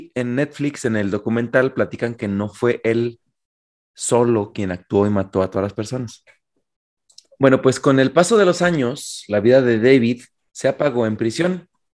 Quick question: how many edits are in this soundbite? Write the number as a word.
zero